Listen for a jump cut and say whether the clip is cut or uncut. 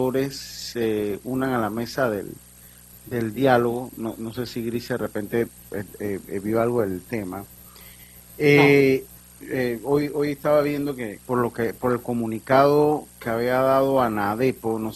cut